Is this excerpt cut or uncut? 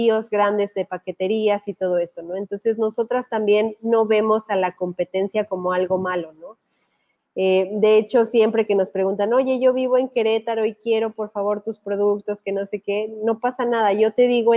uncut